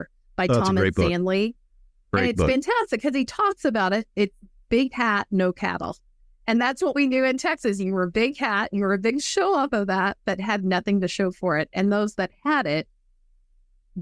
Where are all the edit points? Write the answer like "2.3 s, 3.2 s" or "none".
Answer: none